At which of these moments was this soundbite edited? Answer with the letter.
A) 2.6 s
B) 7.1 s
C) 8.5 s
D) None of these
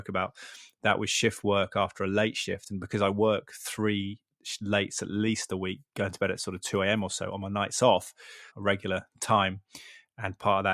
C